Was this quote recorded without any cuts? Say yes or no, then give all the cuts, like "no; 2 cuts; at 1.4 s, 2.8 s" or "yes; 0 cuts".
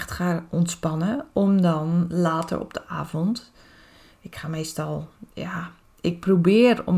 yes; 0 cuts